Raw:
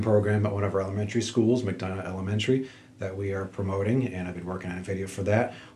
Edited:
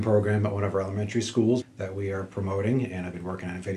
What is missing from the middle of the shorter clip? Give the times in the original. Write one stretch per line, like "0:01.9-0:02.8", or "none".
0:01.6-0:02.8